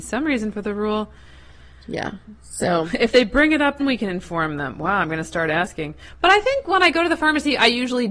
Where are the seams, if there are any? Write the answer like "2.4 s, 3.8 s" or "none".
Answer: 3.8 s

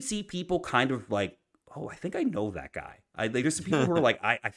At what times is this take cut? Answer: none

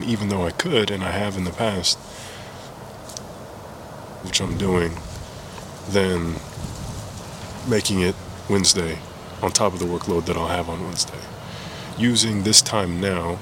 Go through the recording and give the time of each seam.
4.2 s

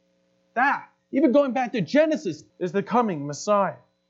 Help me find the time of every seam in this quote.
2.5 s

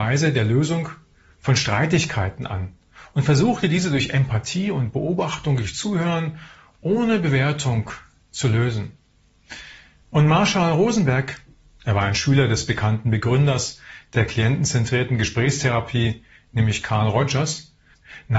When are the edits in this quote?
10.0 s

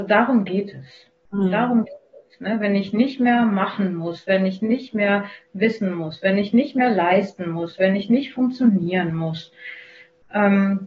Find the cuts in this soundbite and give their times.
none

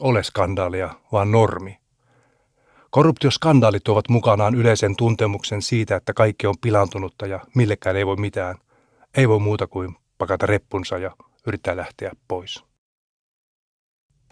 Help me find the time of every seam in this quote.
none

